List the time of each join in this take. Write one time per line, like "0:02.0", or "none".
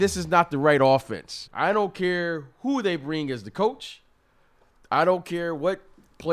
0:01.5